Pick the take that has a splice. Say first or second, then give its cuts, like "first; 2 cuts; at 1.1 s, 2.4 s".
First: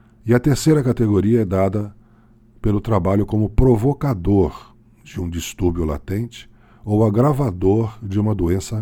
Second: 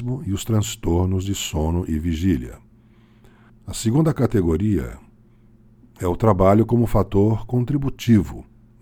second; 1 cut; at 3.5 s